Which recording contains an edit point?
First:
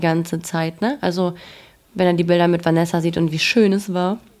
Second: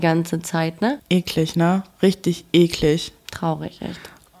second; 1 cut; at 1.0 s

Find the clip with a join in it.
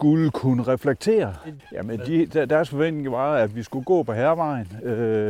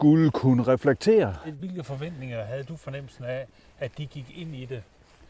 first; 1 cut; at 1.6 s

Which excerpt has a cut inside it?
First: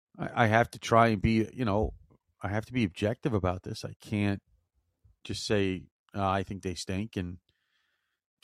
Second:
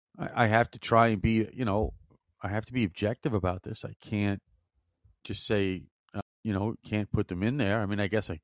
second; 1 cut; at 6.2 s

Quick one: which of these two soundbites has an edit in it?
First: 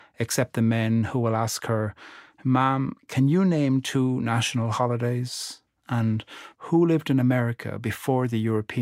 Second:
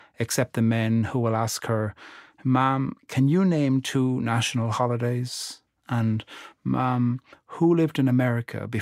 first; 1 cut; at 6.5 s

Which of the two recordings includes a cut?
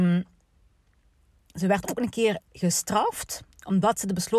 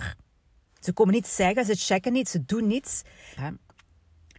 second; 1 cut; at 3.4 s

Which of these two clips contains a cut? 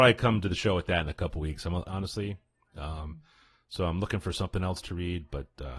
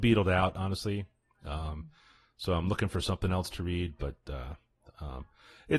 first; 1 cut; at 1.8 s

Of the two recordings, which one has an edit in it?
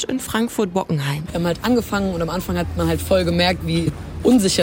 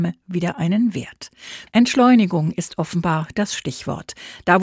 second; 1 cut; at 1.7 s

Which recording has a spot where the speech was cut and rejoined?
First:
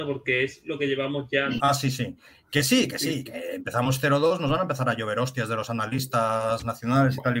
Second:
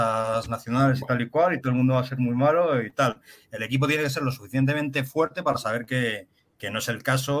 first; 1 cut; at 1.6 s

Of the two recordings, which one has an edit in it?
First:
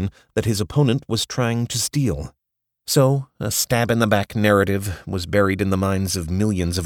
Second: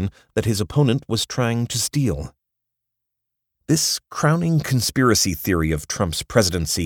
first; 1 cut; at 2.8 s

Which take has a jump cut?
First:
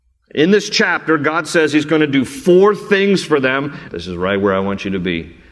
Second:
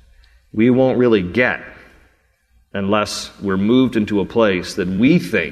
first; 1 cut; at 3.9 s

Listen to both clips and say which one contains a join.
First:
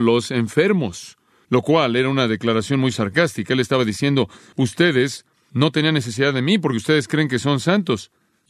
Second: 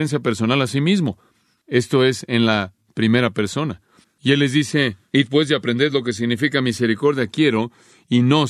second; 1 cut; at 4.0 s

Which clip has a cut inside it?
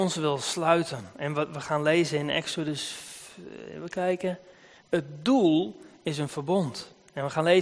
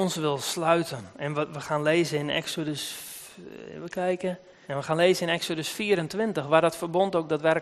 second; 1 cut; at 4.6 s

